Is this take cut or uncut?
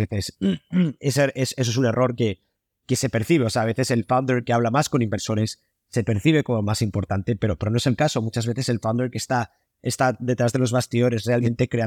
uncut